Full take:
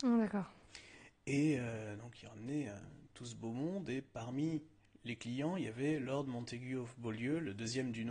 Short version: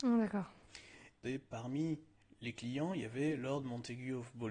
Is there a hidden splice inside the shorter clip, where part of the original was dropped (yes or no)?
yes